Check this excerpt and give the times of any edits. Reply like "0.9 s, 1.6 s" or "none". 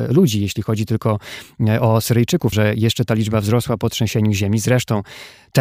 2.5 s